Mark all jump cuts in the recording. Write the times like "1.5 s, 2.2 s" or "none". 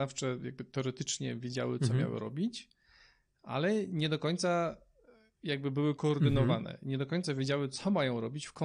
none